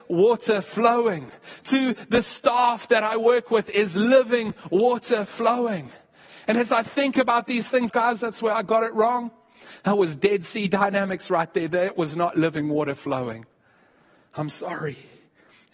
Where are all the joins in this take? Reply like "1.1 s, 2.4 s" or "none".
7.9 s